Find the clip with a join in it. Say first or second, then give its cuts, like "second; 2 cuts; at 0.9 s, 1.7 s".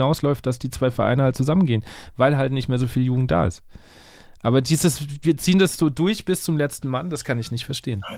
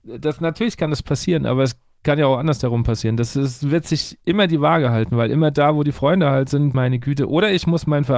second; 1 cut; at 6.7 s